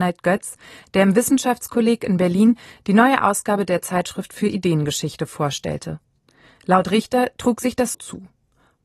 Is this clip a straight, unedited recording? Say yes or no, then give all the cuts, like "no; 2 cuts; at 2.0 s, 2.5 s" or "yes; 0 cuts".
no; 1 cut; at 7.9 s